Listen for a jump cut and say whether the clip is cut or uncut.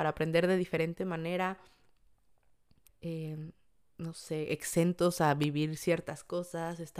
cut